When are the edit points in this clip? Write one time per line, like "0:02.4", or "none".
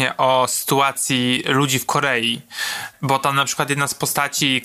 none